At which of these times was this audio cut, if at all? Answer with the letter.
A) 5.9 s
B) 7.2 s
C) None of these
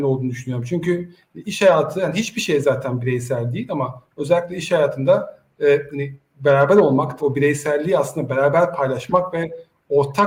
B